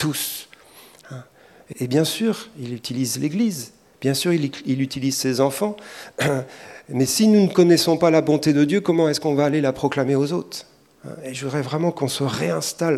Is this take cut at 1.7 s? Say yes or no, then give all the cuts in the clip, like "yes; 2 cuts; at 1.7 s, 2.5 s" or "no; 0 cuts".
yes; 1 cut; at 1.7 s